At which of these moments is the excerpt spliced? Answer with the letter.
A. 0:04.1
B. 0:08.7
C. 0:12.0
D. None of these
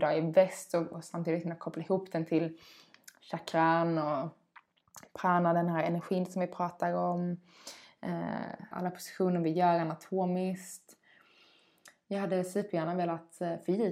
B